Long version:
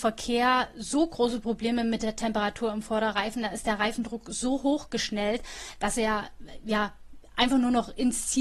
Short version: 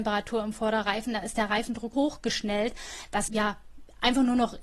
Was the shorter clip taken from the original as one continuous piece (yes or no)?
no